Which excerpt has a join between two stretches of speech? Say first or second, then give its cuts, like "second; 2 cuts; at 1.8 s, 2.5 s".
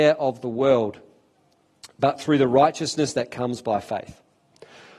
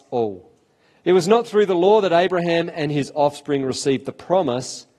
second; 1 cut; at 1.0 s